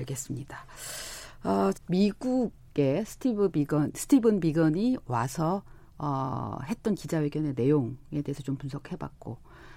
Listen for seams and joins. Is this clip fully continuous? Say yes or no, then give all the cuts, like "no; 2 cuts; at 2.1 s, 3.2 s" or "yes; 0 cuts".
no; 1 cut; at 1.7 s